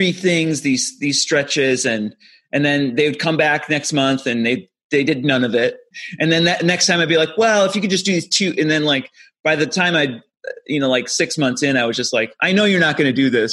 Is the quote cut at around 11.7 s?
no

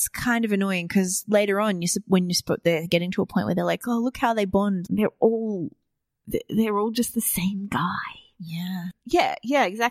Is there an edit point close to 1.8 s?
no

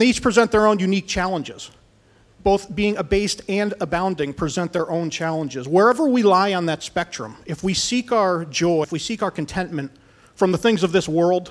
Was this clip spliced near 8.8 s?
yes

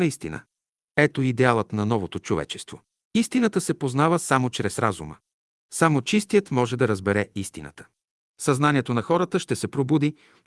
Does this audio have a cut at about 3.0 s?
yes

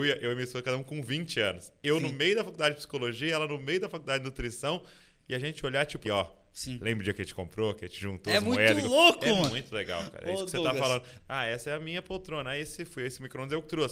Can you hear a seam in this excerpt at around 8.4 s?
no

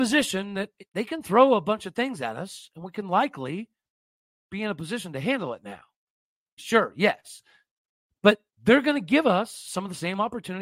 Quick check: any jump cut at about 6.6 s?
yes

